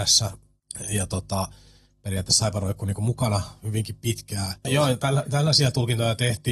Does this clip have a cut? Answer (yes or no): yes